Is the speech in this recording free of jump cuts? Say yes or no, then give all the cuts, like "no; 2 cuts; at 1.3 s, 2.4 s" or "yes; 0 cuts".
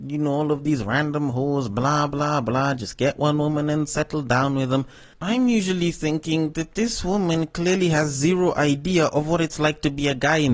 yes; 0 cuts